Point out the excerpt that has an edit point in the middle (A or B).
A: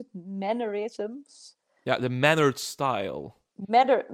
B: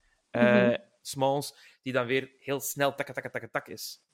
B